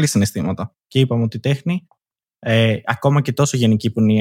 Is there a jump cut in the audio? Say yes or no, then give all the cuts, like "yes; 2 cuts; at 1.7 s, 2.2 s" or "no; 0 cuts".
no; 0 cuts